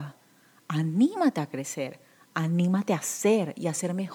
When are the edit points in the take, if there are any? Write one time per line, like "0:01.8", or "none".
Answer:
none